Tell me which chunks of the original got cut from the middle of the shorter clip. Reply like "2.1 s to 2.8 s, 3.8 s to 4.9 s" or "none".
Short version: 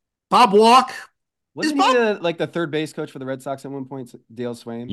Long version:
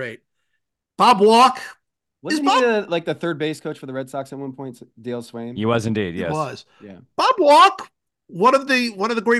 none